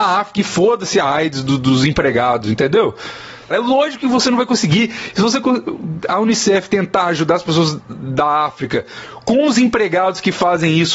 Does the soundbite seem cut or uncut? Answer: cut